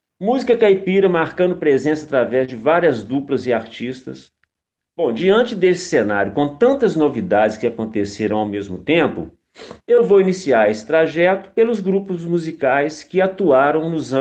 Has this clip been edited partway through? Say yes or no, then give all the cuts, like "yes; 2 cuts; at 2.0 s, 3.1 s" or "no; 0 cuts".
yes; 2 cuts; at 4.8 s, 9.8 s